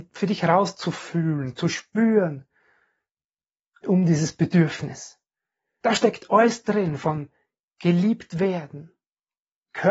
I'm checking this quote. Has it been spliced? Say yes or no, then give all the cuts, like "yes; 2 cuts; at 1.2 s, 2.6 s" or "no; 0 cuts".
yes; 2 cuts; at 3.8 s, 5.8 s